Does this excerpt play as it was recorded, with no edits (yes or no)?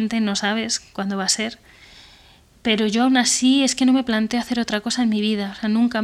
yes